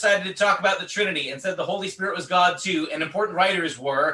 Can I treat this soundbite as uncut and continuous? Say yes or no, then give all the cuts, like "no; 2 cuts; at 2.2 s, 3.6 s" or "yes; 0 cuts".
yes; 0 cuts